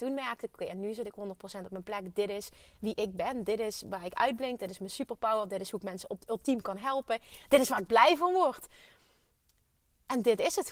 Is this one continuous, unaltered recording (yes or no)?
yes